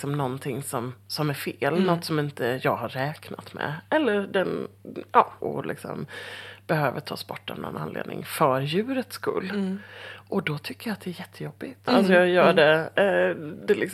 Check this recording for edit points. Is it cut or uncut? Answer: cut